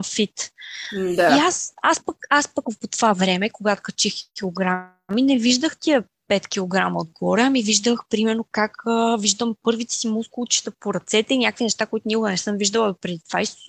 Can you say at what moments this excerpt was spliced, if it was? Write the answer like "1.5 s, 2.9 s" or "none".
4.3 s